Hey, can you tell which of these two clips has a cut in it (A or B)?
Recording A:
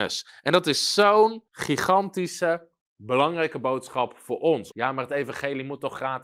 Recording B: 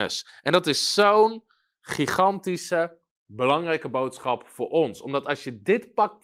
A